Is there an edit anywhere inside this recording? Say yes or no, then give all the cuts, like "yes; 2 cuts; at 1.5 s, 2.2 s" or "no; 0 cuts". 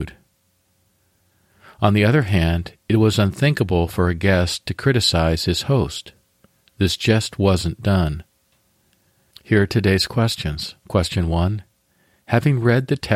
yes; 2 cuts; at 9.3 s, 10.8 s